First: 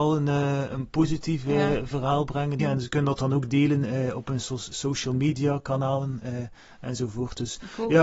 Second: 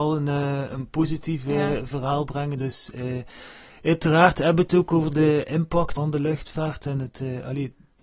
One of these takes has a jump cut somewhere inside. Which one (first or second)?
first